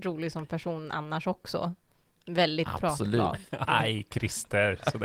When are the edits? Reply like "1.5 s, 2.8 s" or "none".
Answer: 3.6 s